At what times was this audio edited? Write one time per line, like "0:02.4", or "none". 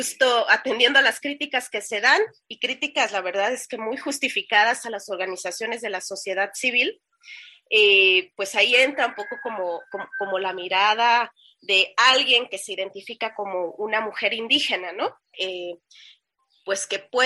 0:15.3